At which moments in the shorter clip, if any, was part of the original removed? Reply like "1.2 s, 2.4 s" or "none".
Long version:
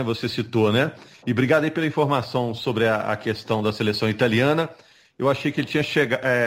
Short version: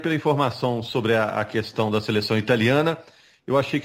none